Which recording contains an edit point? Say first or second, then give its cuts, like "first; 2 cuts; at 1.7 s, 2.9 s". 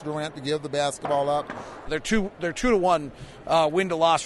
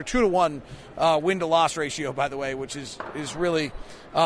first; 1 cut; at 1.9 s